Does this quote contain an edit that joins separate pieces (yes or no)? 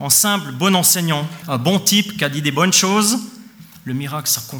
yes